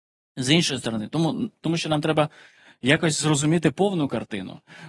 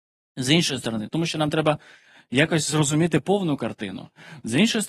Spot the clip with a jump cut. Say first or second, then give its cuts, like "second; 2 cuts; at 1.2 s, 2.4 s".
second; 1 cut; at 1.1 s